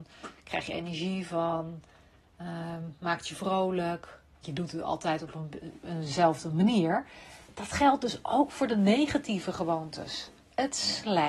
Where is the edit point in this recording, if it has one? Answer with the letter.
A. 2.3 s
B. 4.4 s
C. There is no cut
B